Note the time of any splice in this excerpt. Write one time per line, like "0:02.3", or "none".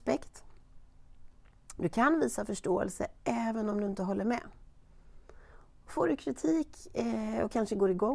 none